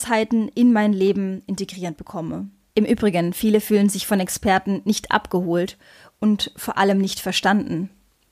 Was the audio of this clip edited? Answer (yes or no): yes